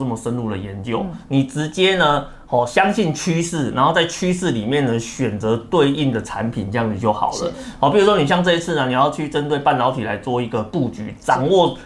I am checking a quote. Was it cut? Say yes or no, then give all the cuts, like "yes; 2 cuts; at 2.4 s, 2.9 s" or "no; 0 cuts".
no; 0 cuts